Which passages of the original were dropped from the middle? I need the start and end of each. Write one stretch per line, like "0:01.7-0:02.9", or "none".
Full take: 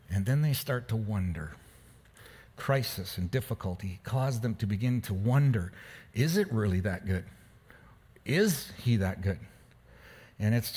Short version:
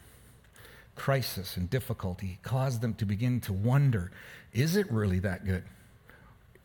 none